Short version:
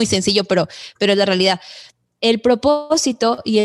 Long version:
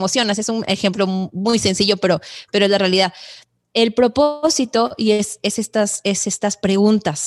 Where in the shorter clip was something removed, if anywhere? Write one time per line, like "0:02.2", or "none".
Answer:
none